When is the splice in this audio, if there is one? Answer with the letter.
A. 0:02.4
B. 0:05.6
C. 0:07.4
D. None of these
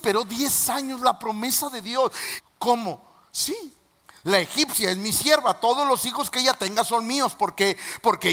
A